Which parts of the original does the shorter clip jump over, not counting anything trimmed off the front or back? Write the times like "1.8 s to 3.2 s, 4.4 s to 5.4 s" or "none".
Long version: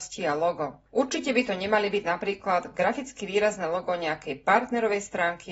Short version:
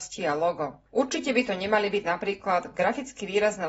none